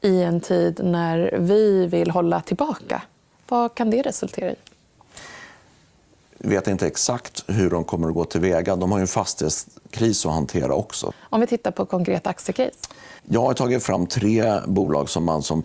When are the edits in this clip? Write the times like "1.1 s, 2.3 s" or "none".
11.1 s, 13.2 s